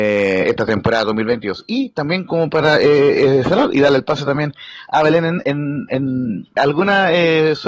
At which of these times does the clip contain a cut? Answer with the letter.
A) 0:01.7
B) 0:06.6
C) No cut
B